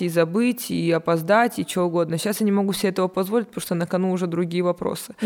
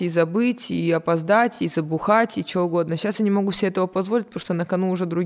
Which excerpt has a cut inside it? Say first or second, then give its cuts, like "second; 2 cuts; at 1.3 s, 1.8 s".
first; 1 cut; at 1.6 s